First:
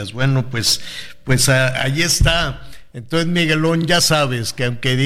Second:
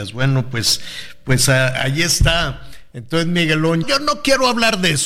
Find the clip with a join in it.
second; 1 cut; at 3.8 s

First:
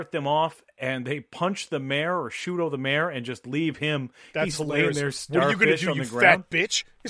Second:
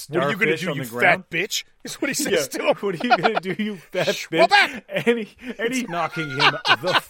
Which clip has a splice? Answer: second; 1 cut; at 5.8 s

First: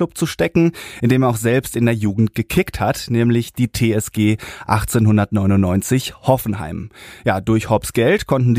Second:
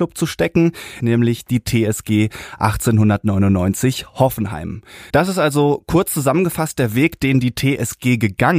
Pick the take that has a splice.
second; 2 cuts; at 1.0 s, 5.1 s

